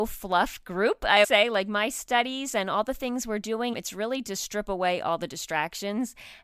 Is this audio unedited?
no; 2 cuts; at 1.2 s, 3.7 s

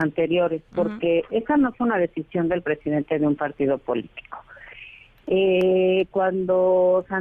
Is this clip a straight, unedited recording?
yes; 0 cuts

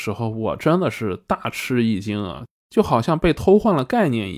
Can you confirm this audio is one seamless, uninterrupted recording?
yes; 0 cuts

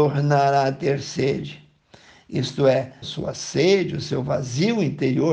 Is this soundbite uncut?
no; 1 cut; at 3.0 s

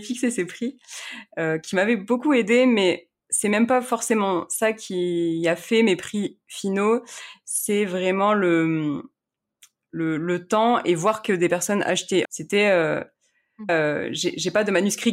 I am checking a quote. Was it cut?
yes; 2 cuts; at 12.2 s, 13.7 s

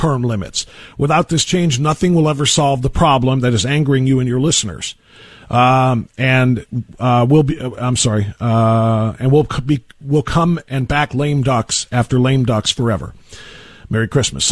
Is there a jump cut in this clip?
no; 0 cuts

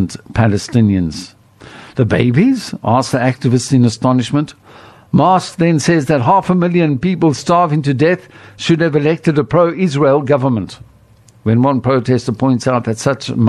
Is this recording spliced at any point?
no; 0 cuts

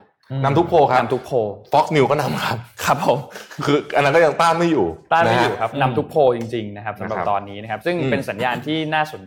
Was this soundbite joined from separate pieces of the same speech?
no; 0 cuts

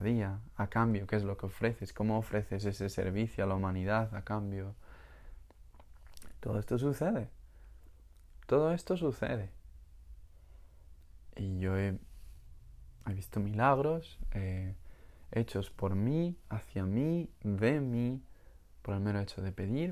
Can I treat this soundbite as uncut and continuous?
yes; 0 cuts

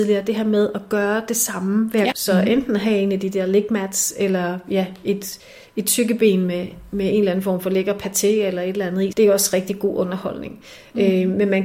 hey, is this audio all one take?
no; 2 cuts; at 2.1 s, 9.1 s

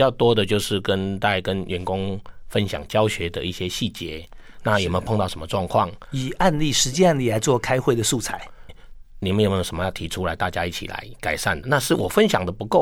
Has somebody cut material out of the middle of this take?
yes; 2 cuts; at 8.7 s, 11.6 s

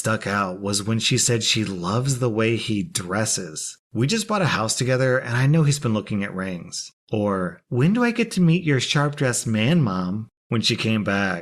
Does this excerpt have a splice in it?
yes; 3 cuts; at 3.8 s, 7.0 s, 10.4 s

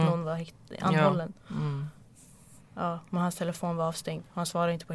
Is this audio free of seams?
yes; 0 cuts

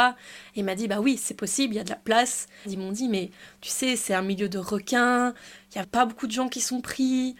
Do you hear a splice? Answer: yes; 2 cuts; at 2.6 s, 5.8 s

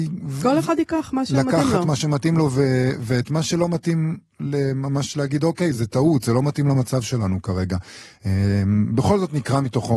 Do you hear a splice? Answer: no; 0 cuts

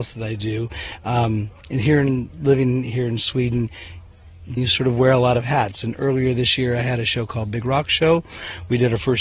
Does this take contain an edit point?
yes; 1 cut; at 4.6 s

